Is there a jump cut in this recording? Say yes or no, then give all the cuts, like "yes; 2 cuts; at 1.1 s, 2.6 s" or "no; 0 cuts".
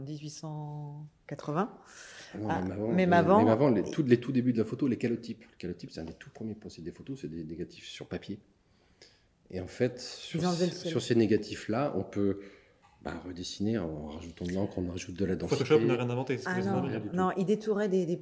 no; 0 cuts